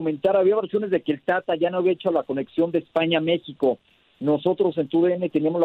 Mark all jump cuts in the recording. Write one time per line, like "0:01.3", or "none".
none

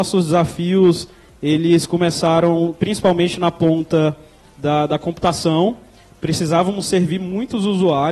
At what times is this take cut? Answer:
none

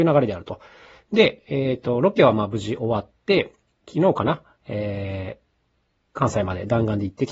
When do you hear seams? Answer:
none

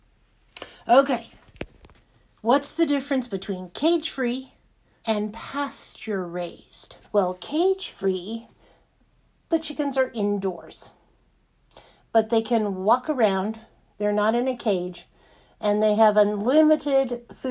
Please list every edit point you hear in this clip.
0:05.0
0:07.0

